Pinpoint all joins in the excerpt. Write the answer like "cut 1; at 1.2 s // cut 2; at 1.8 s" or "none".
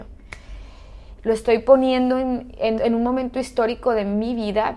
cut 1; at 1.2 s // cut 2; at 2.8 s